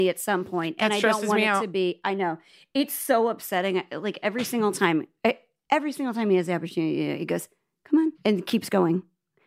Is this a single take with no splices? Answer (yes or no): no